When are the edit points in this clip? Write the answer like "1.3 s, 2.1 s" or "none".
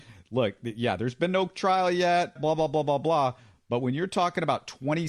2.4 s